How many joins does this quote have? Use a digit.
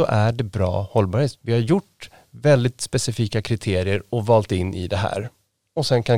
1